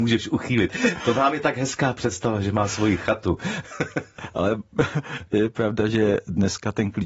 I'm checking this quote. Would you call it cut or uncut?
uncut